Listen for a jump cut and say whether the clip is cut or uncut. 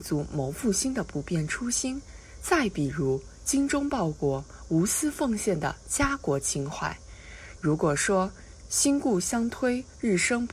cut